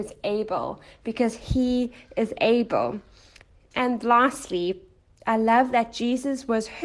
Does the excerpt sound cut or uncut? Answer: cut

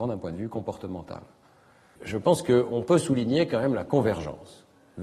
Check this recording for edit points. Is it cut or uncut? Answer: cut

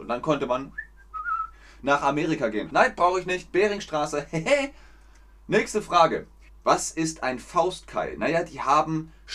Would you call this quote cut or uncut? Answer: cut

